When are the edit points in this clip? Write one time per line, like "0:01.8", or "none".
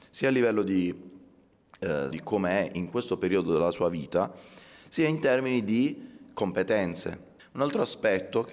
0:02.1
0:07.4